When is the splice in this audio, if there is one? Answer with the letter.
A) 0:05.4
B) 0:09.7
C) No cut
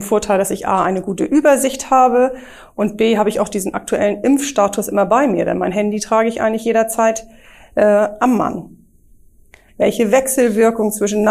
B